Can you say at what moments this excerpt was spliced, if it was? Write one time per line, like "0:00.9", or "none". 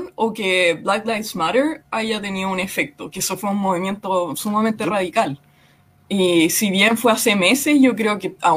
none